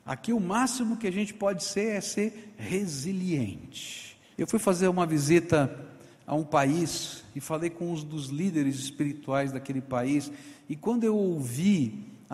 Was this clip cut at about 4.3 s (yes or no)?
yes